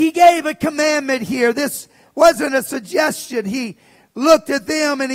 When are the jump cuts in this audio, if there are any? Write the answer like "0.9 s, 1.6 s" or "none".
none